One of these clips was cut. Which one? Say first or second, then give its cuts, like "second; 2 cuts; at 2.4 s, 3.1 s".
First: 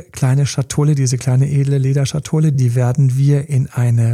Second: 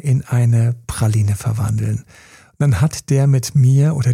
first; 1 cut; at 2.5 s